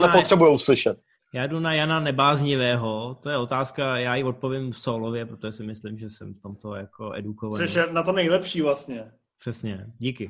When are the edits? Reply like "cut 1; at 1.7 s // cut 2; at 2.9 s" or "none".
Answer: none